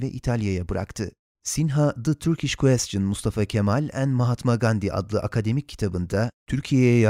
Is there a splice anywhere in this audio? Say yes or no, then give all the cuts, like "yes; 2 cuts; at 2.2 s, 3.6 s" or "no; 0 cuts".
yes; 1 cut; at 1.3 s